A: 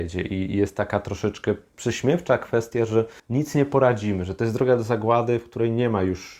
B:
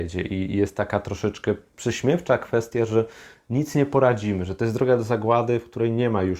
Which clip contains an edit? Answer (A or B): A